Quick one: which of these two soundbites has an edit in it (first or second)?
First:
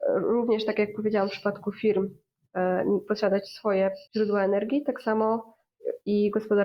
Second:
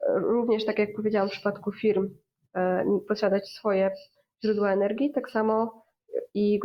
first